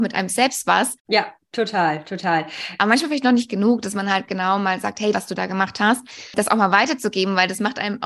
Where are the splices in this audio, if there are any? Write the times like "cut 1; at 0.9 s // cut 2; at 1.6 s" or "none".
cut 1; at 1.0 s // cut 2; at 2.8 s // cut 3; at 5.1 s